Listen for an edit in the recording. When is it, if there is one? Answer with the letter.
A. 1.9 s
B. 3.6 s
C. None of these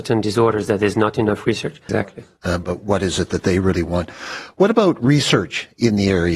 A